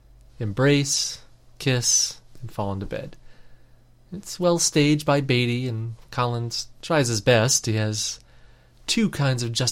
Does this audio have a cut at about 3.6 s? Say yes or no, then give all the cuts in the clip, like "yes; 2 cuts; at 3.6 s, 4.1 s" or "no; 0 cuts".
no; 0 cuts